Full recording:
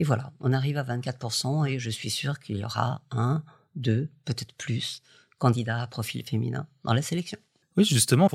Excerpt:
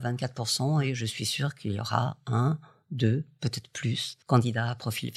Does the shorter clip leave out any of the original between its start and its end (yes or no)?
yes